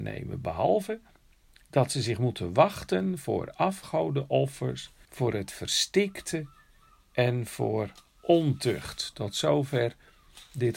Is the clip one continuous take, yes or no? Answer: no